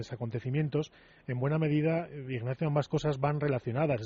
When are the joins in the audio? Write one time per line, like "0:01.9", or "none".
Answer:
none